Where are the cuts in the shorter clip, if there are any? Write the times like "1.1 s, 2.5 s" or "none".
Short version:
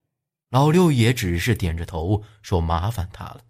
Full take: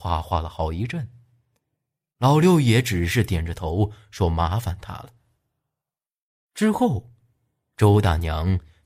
none